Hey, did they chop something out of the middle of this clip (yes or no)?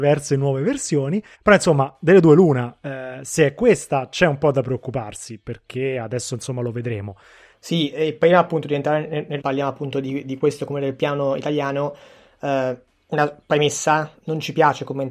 yes